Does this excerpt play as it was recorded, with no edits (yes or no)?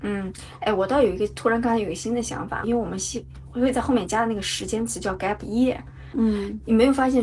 no